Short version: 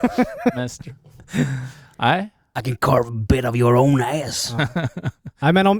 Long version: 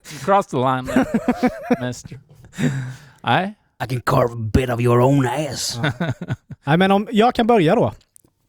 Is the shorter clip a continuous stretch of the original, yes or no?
yes